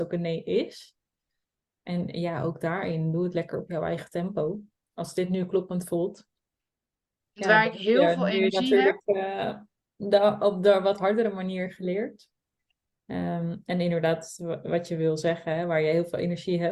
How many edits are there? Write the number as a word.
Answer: one